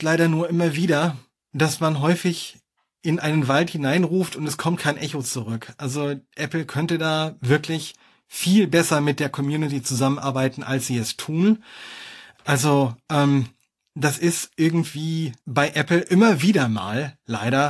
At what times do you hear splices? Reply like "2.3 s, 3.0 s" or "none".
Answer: 12.3 s, 15.4 s

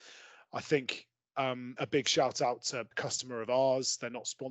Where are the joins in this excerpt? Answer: 1.8 s, 2.9 s

